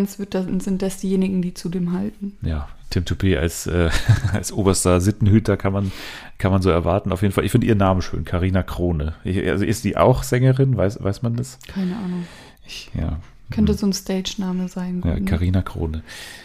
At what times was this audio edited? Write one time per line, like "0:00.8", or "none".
none